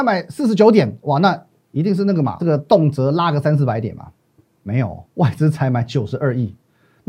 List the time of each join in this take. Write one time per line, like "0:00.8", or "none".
0:02.4
0:05.1